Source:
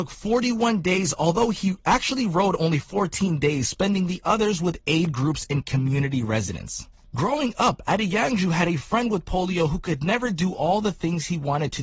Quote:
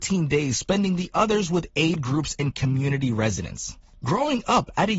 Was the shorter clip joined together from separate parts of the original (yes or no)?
no